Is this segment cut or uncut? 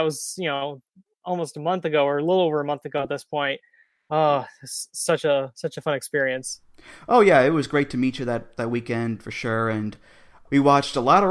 uncut